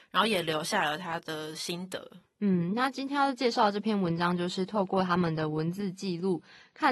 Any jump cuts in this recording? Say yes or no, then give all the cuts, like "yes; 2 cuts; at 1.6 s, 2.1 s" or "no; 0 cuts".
no; 0 cuts